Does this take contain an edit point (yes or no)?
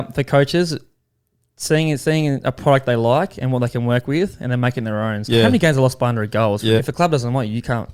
yes